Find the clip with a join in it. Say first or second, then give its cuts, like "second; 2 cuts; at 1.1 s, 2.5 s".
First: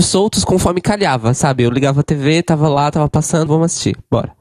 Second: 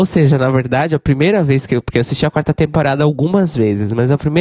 first; 1 cut; at 3.5 s